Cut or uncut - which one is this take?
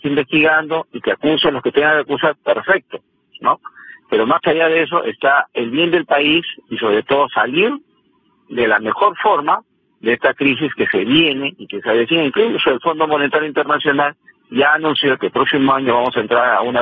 cut